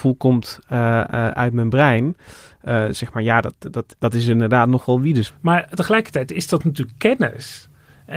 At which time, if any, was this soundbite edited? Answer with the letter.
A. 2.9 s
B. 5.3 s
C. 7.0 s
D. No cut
B